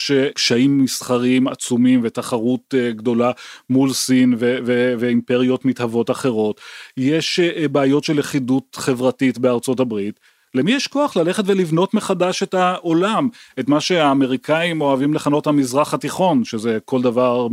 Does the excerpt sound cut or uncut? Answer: uncut